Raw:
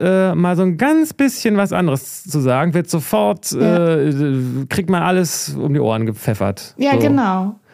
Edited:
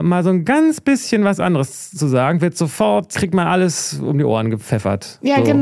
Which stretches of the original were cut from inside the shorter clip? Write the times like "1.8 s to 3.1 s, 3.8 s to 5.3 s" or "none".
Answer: 3.4 s to 4.7 s